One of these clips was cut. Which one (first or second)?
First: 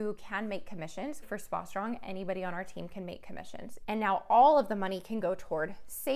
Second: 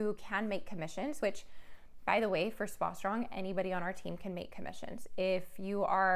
first